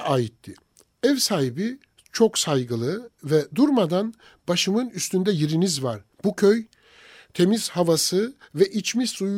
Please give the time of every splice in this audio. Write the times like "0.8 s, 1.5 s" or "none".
6.1 s